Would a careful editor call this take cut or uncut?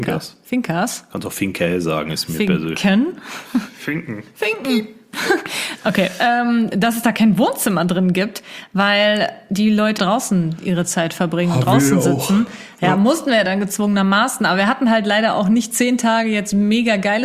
cut